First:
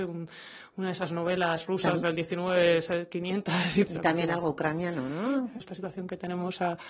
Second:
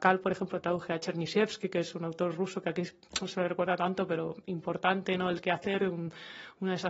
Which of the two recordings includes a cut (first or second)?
first